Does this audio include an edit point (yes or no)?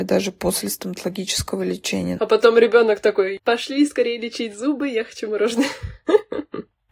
yes